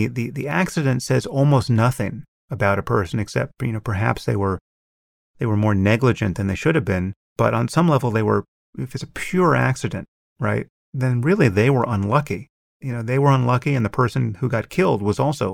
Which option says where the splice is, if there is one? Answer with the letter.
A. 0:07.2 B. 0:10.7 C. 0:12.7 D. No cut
D